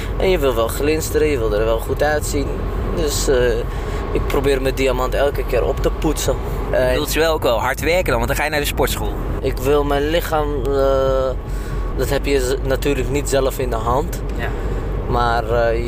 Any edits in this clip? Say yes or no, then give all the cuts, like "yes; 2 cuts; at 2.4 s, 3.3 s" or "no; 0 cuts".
yes; 3 cuts; at 6.7 s, 9.4 s, 11.9 s